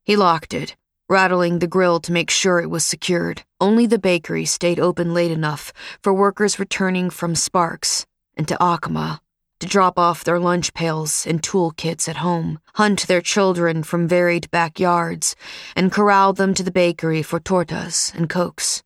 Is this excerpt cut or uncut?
cut